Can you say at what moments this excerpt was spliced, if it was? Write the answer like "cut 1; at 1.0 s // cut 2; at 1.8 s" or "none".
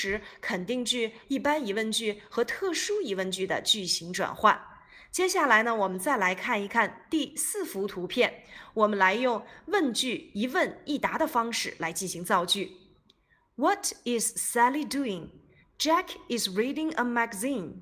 cut 1; at 1.2 s // cut 2; at 15.6 s